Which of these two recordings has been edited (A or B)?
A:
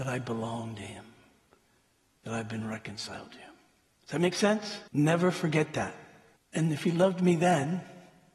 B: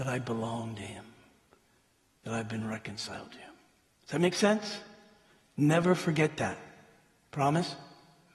A